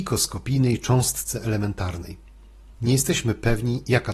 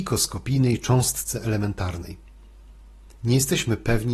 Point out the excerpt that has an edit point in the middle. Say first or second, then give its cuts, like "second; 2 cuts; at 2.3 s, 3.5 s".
first; 1 cut; at 2.7 s